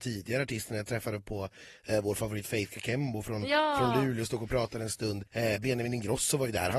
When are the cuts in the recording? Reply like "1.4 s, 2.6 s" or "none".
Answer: 5.3 s